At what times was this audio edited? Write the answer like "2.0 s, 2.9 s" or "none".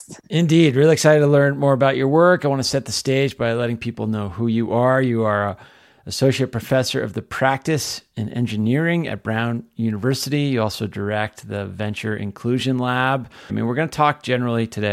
13.5 s